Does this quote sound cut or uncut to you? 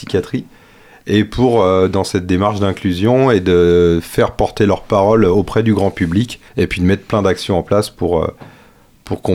cut